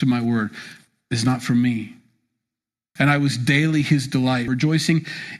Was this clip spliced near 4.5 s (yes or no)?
yes